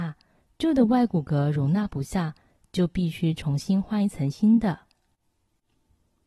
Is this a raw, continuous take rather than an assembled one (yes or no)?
yes